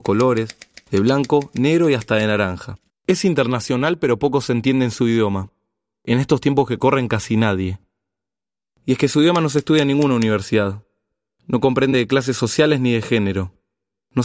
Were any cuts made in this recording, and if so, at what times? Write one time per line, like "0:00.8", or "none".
0:02.9